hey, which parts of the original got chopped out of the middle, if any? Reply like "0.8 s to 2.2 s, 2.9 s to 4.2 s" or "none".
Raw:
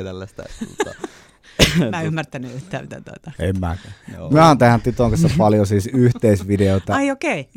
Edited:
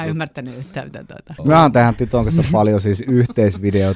3.4 s to 4.2 s